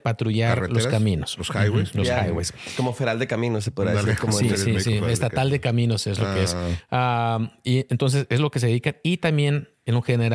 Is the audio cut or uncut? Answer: uncut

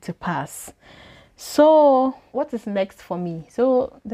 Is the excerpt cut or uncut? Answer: cut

